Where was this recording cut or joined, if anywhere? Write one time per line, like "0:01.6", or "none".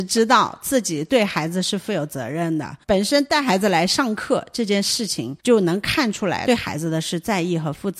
0:02.8
0:05.4